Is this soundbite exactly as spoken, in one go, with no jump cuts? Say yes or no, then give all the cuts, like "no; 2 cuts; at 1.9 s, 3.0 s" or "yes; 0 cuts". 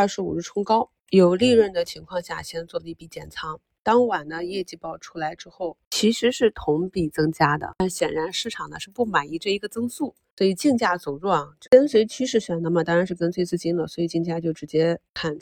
yes; 0 cuts